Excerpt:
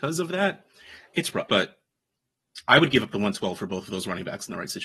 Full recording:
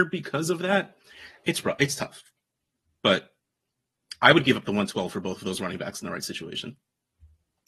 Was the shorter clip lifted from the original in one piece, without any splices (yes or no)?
no